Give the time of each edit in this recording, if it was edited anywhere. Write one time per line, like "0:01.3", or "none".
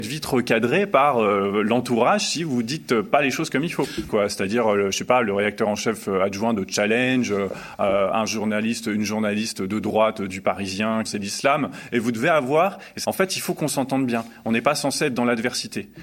0:04.1
0:11.1
0:13.0